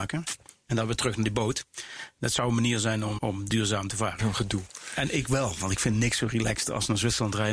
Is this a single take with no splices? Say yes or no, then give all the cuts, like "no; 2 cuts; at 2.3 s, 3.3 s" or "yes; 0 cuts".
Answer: no; 2 cuts; at 3.2 s, 4.2 s